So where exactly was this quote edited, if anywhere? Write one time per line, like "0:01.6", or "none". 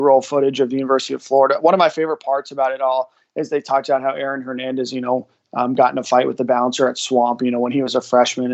none